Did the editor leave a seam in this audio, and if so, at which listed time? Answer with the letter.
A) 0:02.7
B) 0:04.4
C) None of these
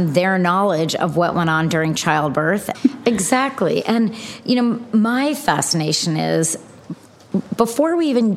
A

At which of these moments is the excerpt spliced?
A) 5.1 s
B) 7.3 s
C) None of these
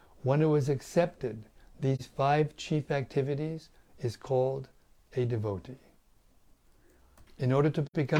B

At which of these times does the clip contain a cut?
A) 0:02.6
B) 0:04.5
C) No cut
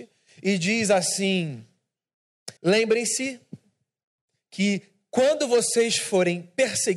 A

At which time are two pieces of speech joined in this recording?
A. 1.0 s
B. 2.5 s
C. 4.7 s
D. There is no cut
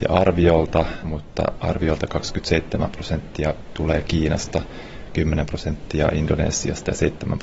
A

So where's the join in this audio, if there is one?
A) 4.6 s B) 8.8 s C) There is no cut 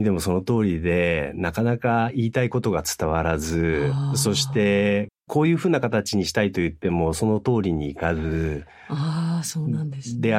C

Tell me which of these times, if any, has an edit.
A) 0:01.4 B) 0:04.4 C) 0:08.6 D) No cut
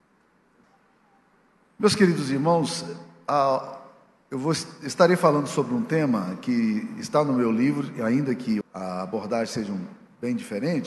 C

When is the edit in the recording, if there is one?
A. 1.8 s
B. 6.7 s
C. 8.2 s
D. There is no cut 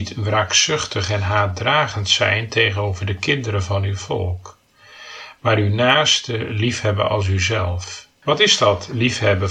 C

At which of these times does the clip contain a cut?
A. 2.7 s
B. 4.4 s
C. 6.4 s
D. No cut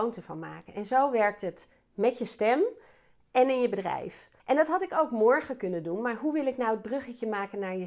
B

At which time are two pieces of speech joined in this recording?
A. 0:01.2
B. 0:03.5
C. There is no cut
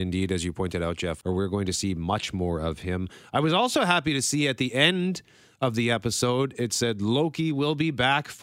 A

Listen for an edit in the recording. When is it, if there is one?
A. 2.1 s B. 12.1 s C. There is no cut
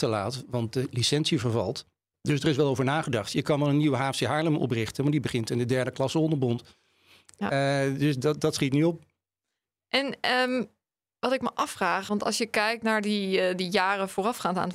C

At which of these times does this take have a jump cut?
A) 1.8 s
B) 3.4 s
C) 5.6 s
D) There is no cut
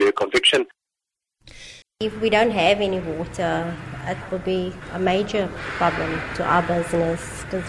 A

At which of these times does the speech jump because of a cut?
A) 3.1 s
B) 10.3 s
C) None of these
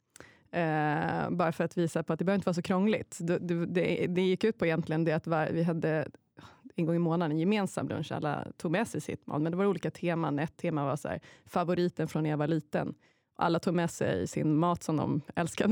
C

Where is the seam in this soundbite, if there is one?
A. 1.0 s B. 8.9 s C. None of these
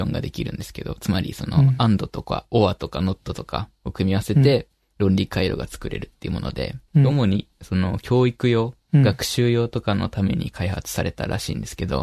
C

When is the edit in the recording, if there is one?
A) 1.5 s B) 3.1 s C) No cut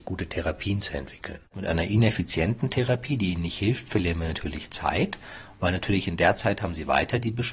A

